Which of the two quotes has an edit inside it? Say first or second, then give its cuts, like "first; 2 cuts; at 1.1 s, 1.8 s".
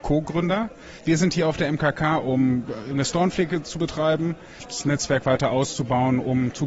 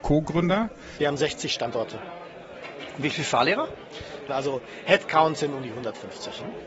second; 2 cuts; at 1.0 s, 4.3 s